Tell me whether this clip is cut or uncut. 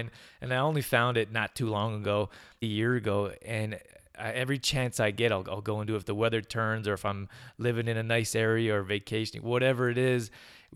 cut